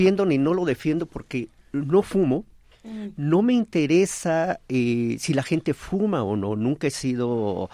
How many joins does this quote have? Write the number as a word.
zero